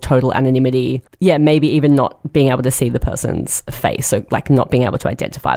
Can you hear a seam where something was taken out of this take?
no; 0 cuts

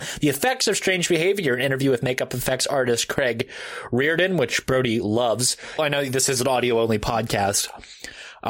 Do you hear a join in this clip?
yes; 1 cut; at 5.8 s

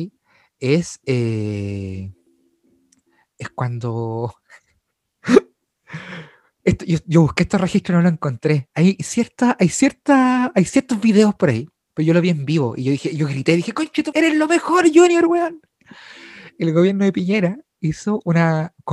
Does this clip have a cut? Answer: yes; 1 cut; at 14.1 s

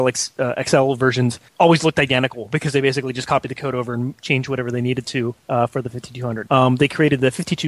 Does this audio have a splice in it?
yes; 3 cuts; at 1.5 s, 5.4 s, 6.5 s

